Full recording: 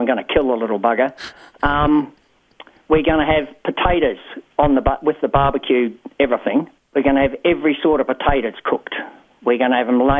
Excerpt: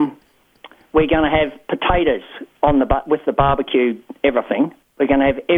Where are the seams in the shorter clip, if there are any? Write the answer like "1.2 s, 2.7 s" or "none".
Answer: none